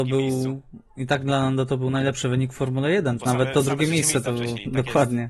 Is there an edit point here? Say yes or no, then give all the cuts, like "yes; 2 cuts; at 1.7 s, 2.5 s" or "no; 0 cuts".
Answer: yes; 1 cut; at 3.2 s